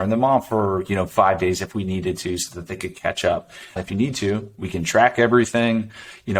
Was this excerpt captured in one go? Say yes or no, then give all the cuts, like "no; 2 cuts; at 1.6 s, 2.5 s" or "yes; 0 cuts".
no; 1 cut; at 3.8 s